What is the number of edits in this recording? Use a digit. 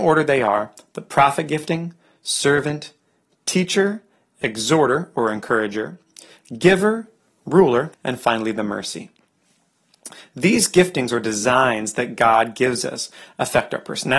1